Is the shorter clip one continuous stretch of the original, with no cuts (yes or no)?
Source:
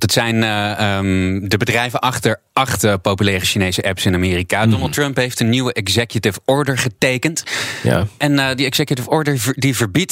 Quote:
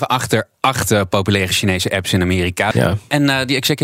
no